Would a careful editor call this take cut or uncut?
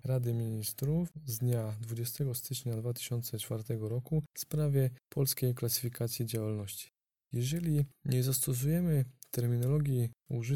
uncut